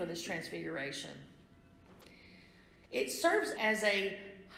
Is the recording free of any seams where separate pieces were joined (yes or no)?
no